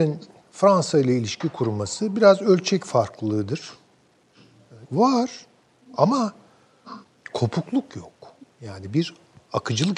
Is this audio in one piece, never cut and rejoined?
no; 1 cut; at 4.8 s

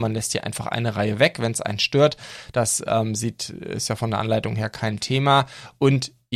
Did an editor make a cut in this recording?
no; 0 cuts

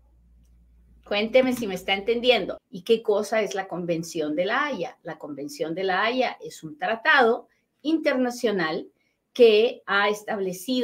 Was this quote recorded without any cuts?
no; 2 cuts; at 2.6 s, 9.8 s

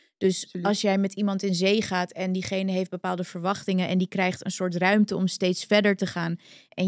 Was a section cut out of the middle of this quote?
no; 0 cuts

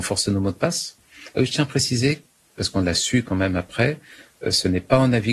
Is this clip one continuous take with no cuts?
no; 1 cut; at 1.3 s

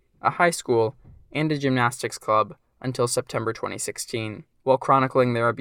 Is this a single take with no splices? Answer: no; 1 cut; at 4.5 s

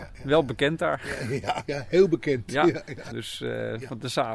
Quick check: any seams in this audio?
yes; 1 cut; at 3.1 s

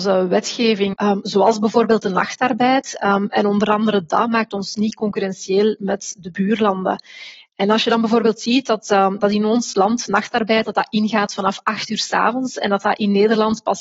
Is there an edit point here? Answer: yes; 1 cut; at 0.9 s

